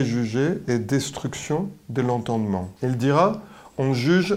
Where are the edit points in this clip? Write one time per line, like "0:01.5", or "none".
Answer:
0:02.8